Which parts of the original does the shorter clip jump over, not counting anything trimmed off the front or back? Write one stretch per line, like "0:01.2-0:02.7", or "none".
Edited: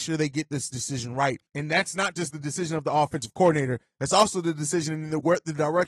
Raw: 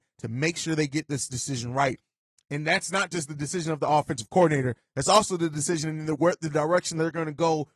0:02.0-0:02.4